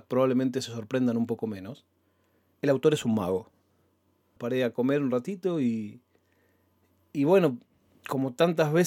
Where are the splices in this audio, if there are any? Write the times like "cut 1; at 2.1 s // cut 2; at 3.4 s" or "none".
cut 1; at 4.4 s